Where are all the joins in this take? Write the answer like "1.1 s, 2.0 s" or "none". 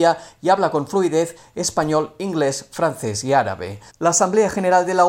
3.9 s